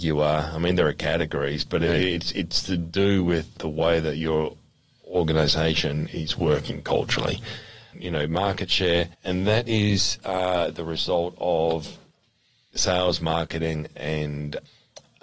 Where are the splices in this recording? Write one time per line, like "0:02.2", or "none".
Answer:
0:07.9
0:09.1